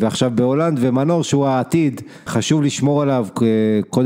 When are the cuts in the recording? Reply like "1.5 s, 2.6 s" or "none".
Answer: 2.3 s